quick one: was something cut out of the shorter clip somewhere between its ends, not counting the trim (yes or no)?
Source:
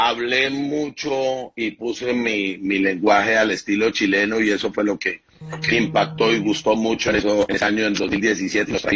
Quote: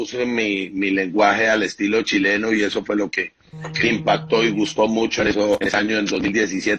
no